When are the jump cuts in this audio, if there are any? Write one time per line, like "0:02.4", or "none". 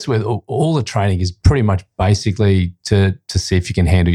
none